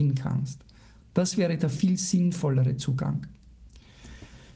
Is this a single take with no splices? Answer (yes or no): yes